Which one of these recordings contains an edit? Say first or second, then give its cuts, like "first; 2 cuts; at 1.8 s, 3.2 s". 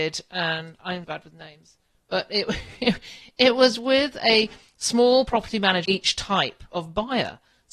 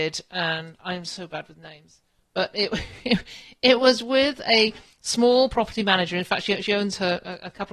first; 2 cuts; at 1.0 s, 5.9 s